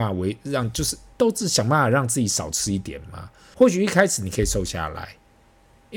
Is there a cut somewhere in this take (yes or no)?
yes